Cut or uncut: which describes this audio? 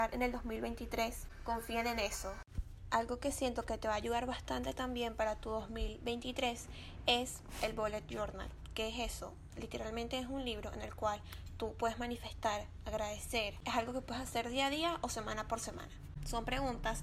uncut